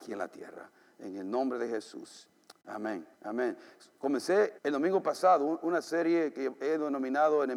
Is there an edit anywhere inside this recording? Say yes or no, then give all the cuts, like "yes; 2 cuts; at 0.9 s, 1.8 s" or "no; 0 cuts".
yes; 2 cuts; at 3.1 s, 4.6 s